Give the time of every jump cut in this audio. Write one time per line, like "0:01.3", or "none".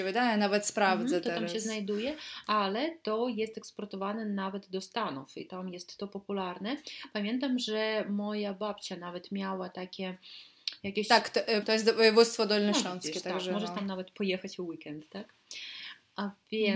0:11.6

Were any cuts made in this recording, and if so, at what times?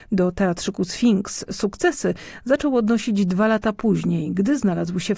none

